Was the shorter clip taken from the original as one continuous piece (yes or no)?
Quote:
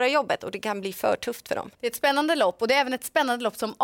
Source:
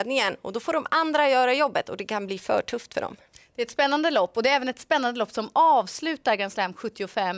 no